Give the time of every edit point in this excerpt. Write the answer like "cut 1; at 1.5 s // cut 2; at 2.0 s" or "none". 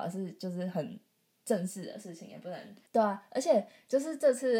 cut 1; at 2.9 s